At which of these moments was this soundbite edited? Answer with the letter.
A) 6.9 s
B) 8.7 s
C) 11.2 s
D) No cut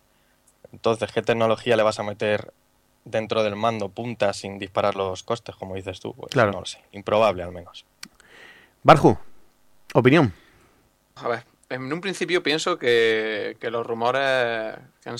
C